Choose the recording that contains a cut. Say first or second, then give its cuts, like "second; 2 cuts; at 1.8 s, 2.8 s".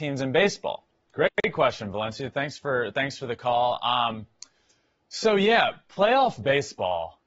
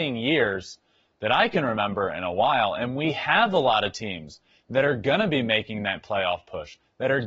first; 1 cut; at 1.1 s